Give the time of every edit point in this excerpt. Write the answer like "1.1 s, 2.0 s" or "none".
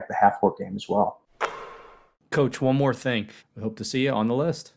3.4 s